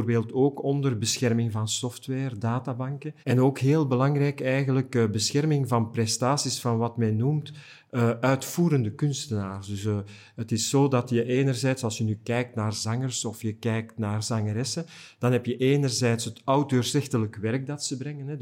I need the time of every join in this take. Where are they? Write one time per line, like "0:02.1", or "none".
0:03.2